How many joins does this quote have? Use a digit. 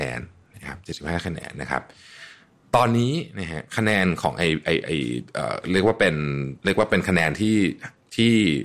2